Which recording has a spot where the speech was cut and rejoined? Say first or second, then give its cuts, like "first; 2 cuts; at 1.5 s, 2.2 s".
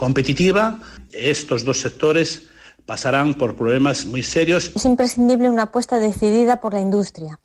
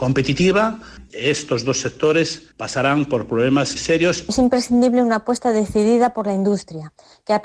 second; 2 cuts; at 2.5 s, 3.8 s